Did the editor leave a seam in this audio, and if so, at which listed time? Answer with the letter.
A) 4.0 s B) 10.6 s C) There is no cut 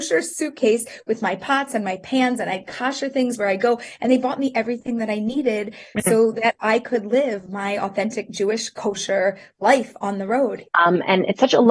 B